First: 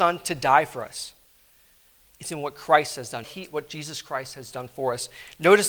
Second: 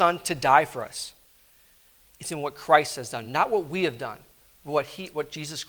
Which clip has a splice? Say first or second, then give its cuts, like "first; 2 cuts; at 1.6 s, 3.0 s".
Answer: first; 1 cut; at 3.2 s